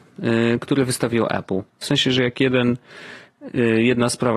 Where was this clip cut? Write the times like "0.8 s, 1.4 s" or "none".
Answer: 1.8 s